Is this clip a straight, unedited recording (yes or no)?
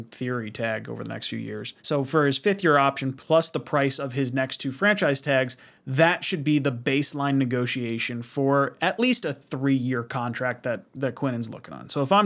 no